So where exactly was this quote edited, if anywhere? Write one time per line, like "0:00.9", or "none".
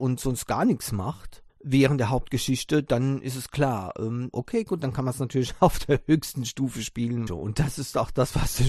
0:01.5
0:04.3
0:07.3